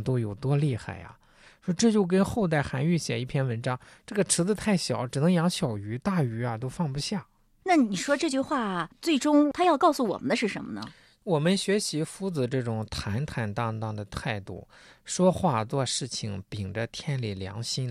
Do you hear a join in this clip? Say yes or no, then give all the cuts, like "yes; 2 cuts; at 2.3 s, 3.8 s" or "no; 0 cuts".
no; 0 cuts